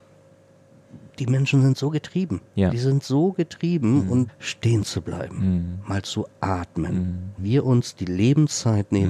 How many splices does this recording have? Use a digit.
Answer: 3